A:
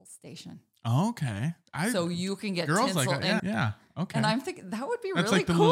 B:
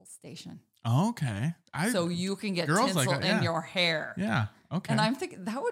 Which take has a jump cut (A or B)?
A